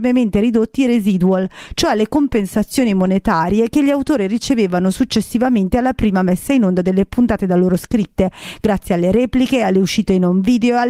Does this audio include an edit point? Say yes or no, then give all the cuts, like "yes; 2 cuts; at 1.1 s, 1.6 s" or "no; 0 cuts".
no; 0 cuts